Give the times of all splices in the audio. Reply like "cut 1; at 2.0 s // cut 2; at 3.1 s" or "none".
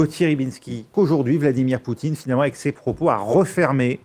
cut 1; at 0.9 s